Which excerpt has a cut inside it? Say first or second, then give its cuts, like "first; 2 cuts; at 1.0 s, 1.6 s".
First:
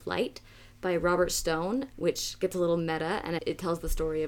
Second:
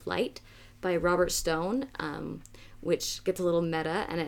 first; 2 cuts; at 1.9 s, 3.4 s